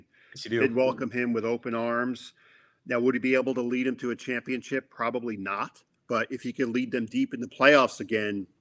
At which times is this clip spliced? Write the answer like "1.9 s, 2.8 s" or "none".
none